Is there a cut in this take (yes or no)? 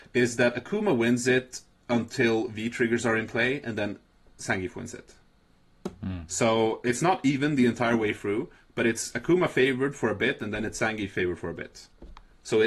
no